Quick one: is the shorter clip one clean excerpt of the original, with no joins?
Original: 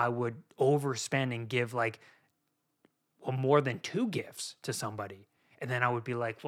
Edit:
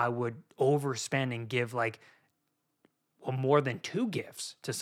yes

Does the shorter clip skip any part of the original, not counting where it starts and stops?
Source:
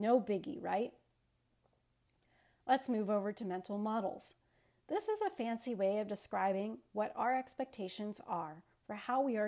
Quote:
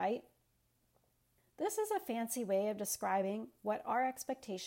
yes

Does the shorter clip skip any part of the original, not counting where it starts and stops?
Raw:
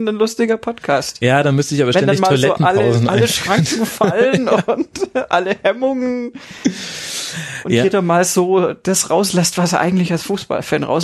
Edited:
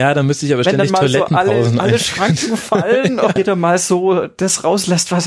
yes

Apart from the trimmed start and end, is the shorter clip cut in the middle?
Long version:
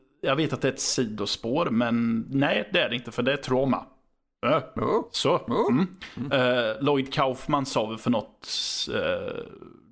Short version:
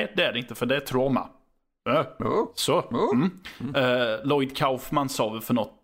no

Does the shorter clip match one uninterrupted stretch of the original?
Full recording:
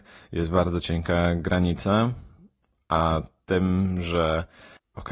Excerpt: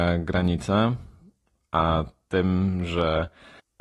yes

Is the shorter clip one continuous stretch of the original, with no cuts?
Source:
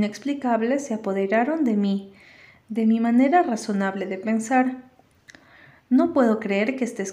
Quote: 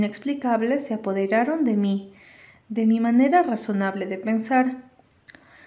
yes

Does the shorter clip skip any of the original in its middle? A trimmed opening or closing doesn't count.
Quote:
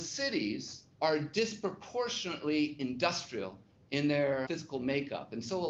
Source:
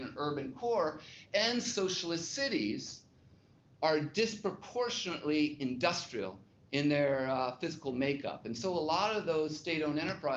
yes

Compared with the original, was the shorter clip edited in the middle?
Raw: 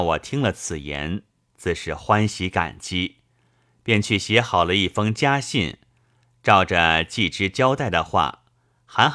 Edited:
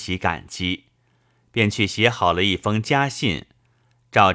no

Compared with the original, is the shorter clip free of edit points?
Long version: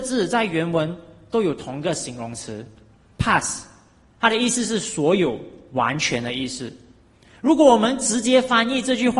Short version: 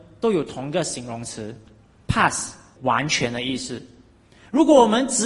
no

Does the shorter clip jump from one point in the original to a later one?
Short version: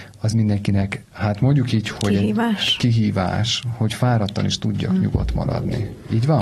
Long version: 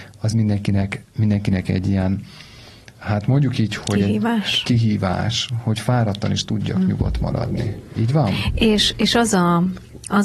yes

